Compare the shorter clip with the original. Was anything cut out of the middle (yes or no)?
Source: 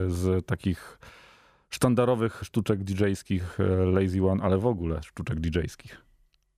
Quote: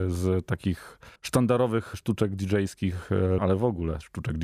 yes